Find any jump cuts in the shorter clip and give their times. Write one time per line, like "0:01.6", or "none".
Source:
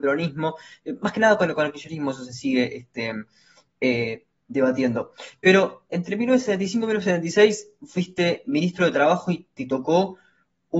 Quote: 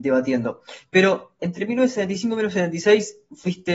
none